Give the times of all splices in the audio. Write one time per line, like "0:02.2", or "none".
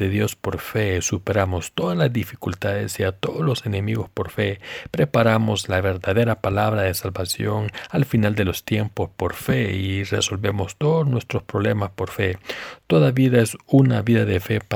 none